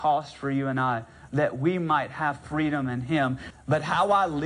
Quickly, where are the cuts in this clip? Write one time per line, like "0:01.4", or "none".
0:03.5